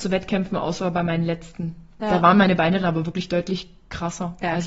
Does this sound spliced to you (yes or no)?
no